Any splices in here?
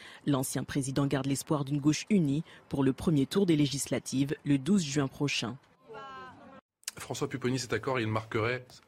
no; 0 cuts

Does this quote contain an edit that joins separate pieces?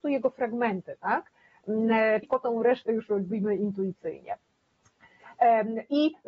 yes; 1 cut; at 2.2 s

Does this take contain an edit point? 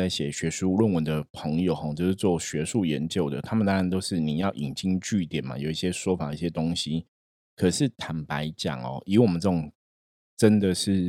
no; 0 cuts

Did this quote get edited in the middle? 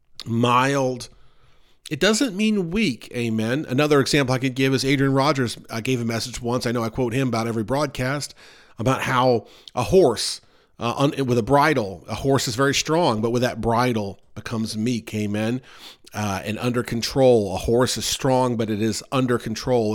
no; 0 cuts

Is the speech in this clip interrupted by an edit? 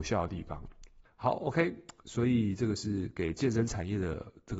yes; 1 cut; at 1.1 s

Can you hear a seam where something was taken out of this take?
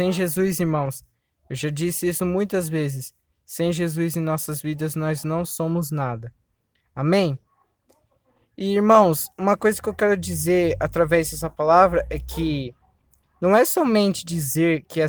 no; 0 cuts

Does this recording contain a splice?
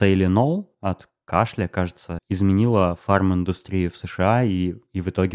yes; 1 cut; at 2.2 s

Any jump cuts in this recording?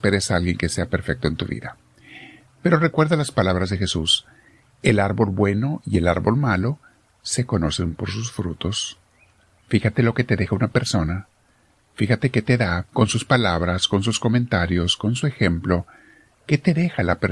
yes; 1 cut; at 12.9 s

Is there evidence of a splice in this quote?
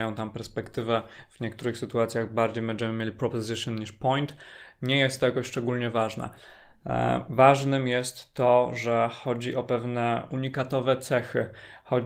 no; 0 cuts

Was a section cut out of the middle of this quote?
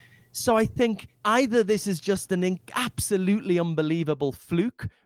yes; 1 cut; at 1.1 s

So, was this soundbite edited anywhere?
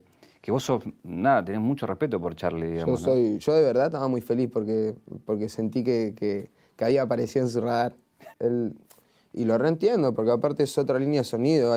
yes; 2 cuts; at 3.4 s, 8.3 s

